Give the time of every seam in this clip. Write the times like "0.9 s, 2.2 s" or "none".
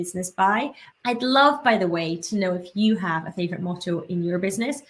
0.9 s